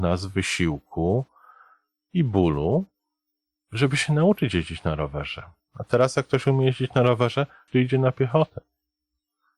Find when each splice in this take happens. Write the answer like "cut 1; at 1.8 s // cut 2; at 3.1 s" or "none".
cut 1; at 7.7 s

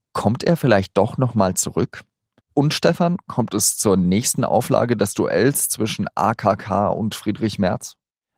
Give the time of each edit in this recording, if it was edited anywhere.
cut 1; at 2.4 s

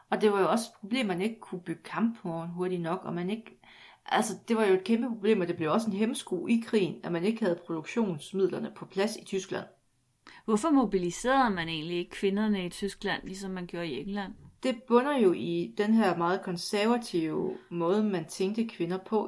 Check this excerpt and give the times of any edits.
none

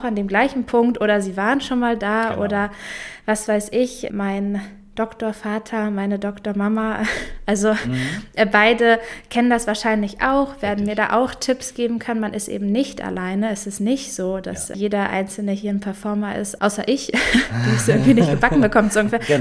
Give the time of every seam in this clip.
none

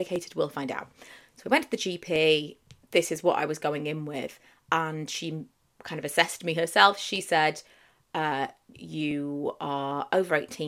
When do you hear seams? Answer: cut 1; at 8.7 s

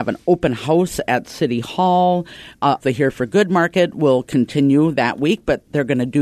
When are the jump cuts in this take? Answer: cut 1; at 2.8 s

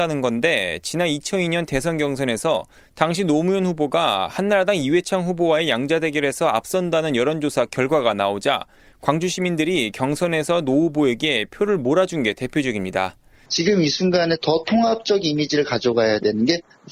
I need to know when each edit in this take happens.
cut 1; at 13.5 s

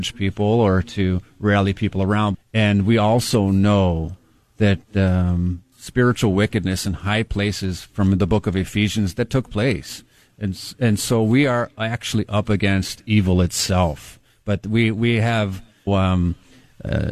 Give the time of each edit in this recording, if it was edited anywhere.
cut 1; at 2.3 s // cut 2; at 5.7 s // cut 3; at 15.9 s

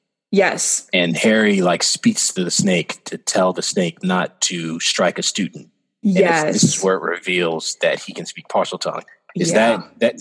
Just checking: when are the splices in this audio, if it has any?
none

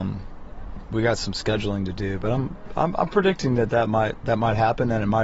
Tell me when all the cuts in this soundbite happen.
none

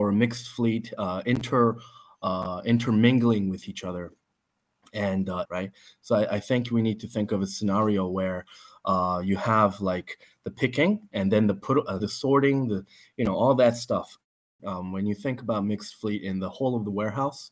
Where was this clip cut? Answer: cut 1; at 5.5 s // cut 2; at 12.0 s // cut 3; at 14.6 s

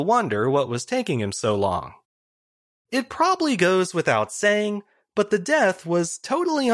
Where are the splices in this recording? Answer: none

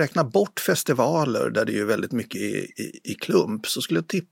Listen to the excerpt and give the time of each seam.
none

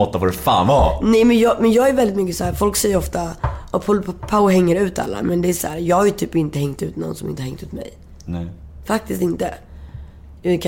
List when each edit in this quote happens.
none

